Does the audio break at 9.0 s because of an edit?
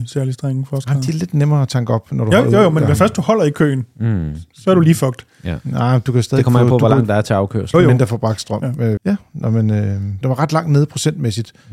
yes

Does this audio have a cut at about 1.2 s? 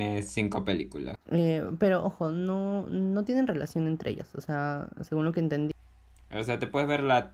yes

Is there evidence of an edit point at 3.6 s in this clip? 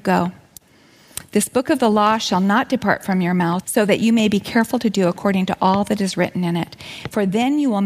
yes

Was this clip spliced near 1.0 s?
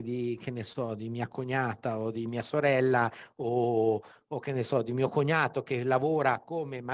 no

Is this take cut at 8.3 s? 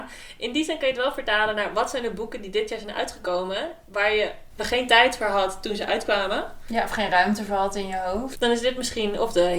yes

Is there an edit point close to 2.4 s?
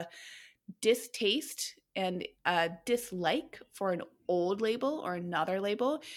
yes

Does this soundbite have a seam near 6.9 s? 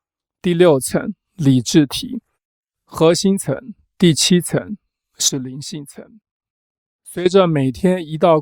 no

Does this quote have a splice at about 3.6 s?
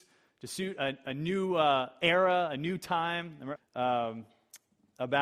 yes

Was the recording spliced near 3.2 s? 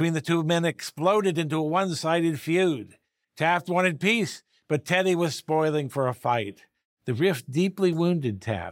no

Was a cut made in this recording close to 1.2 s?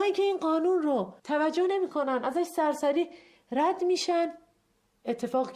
yes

